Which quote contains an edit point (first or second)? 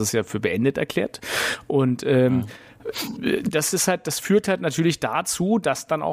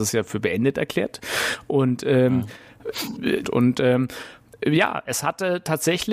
second